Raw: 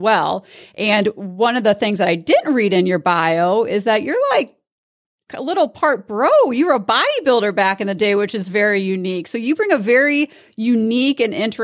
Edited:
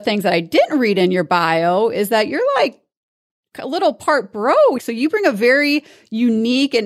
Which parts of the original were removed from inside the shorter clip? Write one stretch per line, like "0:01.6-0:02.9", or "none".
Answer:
0:06.5-0:09.2